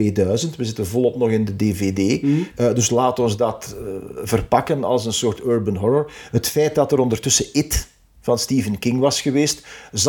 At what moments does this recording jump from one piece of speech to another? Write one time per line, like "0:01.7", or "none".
0:02.5